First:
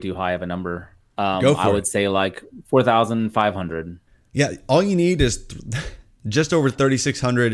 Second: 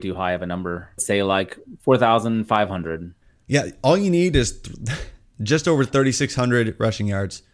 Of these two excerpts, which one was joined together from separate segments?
second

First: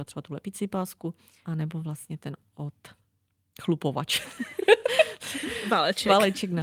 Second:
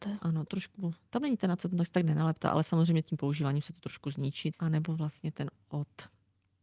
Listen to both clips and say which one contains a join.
second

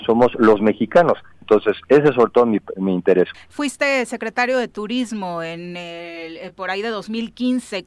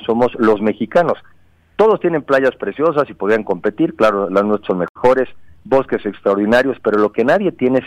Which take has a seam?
first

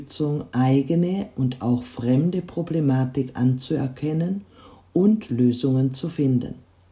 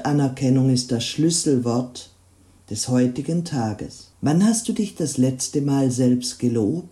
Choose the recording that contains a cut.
second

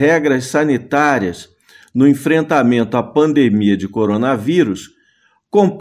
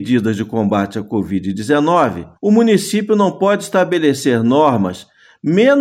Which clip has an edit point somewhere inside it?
second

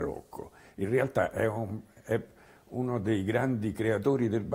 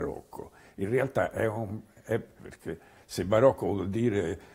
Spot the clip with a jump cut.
second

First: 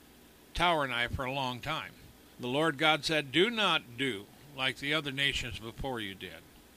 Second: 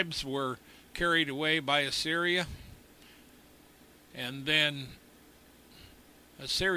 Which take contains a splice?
first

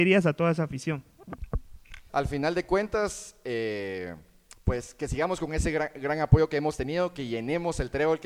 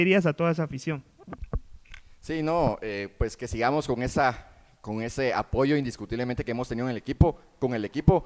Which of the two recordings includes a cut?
first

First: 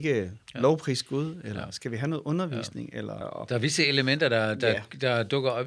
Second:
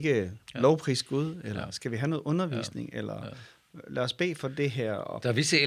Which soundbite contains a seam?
first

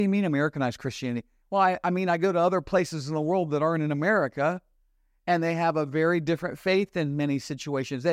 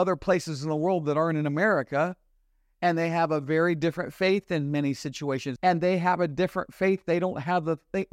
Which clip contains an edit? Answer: second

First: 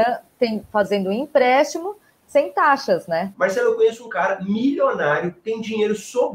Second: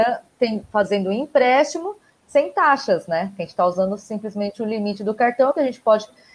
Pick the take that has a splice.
first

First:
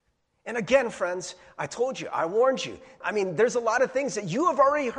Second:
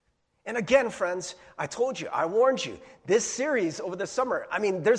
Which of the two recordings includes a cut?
first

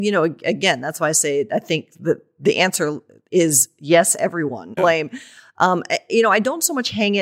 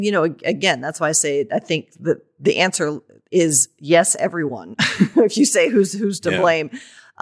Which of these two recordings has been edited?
first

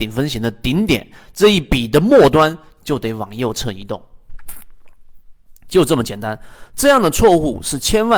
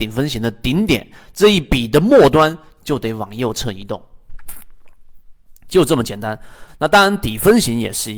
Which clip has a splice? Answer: second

